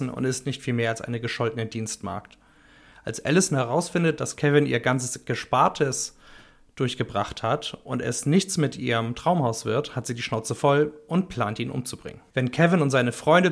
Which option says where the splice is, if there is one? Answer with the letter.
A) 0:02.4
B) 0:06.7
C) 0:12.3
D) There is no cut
C